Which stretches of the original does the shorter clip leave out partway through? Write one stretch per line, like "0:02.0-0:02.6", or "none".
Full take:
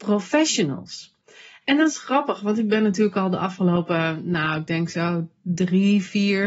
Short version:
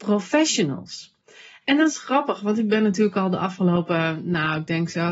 none